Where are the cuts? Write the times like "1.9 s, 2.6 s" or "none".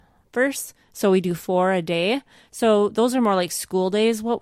none